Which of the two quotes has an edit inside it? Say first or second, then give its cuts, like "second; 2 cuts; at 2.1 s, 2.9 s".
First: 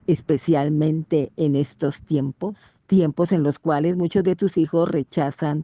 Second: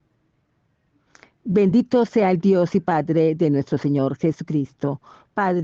first; 1 cut; at 2.8 s